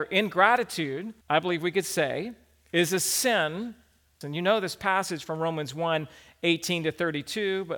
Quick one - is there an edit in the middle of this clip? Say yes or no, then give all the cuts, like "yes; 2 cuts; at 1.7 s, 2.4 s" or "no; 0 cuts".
yes; 2 cuts; at 1.2 s, 4.2 s